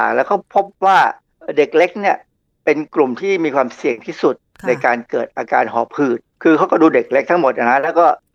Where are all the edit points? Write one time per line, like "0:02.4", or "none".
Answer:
none